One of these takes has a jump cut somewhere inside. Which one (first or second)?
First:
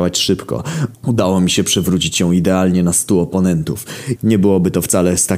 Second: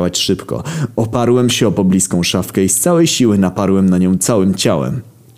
first